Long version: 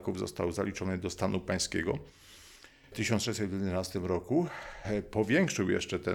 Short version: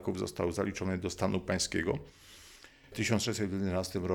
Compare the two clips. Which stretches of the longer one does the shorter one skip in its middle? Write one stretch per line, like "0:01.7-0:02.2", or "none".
none